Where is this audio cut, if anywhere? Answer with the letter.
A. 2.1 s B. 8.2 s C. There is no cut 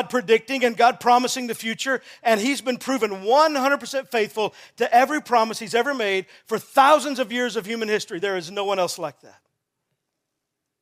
C